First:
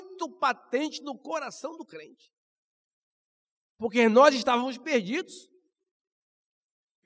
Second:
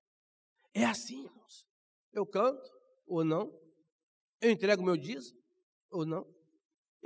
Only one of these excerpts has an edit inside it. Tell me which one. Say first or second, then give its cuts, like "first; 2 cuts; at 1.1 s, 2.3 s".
second; 1 cut; at 1.9 s